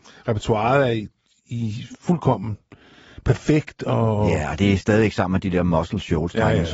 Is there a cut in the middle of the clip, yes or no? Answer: no